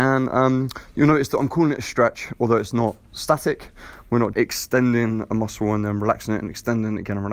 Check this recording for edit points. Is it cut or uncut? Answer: cut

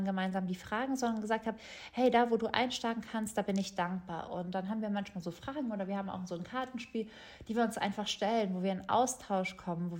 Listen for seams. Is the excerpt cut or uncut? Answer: uncut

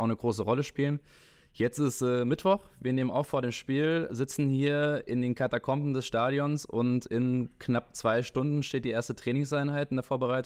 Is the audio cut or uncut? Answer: uncut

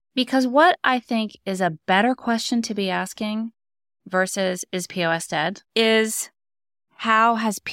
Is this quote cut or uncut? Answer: cut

